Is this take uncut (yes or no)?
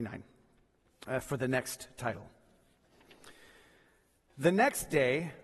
yes